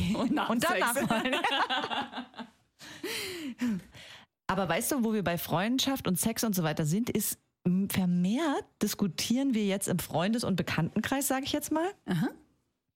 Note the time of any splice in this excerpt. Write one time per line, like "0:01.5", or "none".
none